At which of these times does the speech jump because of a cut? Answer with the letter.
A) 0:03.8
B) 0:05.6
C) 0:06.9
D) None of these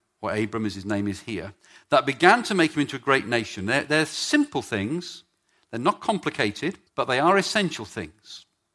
C